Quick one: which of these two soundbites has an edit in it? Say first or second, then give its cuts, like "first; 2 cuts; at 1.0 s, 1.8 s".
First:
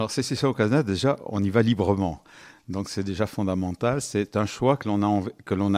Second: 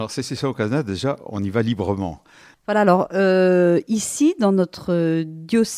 second; 1 cut; at 2.5 s